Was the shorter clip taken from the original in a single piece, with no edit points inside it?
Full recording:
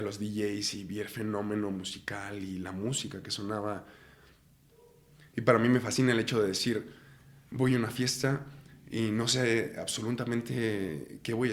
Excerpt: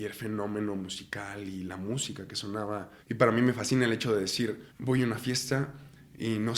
no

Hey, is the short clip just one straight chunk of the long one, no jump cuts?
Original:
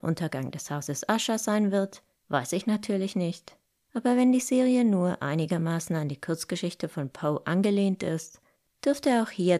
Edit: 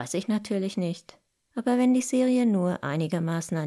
yes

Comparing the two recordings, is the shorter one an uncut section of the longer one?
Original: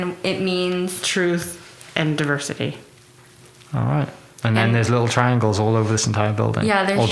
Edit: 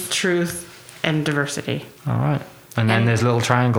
no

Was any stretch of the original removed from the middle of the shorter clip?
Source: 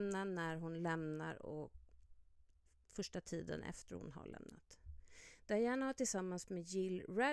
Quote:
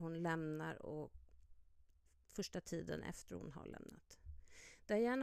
no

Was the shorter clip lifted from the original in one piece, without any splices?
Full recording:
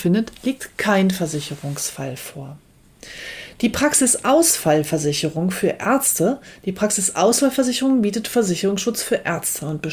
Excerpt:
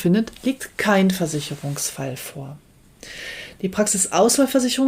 no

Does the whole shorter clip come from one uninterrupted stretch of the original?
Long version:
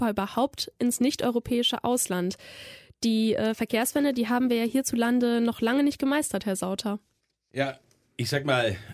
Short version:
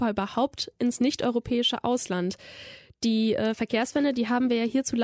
yes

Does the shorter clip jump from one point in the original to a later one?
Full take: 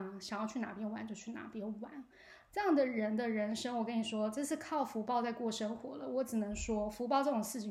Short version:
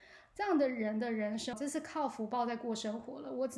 yes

